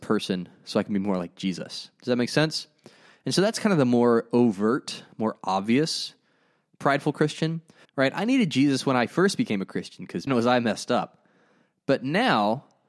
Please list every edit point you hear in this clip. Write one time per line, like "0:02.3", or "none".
0:07.8
0:10.3